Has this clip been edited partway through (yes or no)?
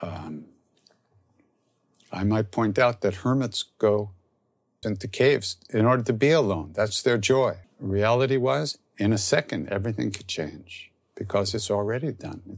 yes